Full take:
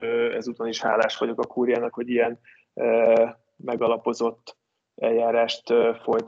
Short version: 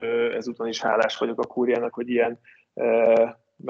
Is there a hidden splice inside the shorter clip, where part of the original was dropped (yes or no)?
no